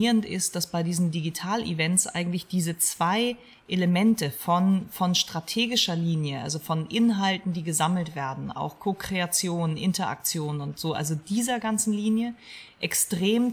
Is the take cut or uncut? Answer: uncut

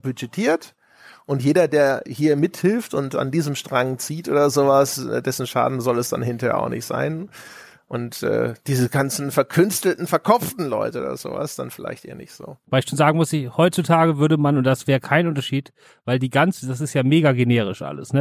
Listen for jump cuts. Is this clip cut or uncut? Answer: uncut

